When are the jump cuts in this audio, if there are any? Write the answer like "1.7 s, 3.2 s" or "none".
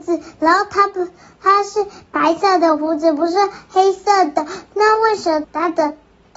5.4 s